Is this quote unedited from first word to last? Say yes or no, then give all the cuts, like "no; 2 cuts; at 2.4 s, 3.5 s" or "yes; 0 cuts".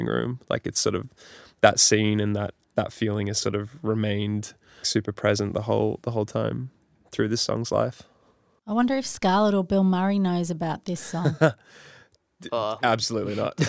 no; 1 cut; at 4.8 s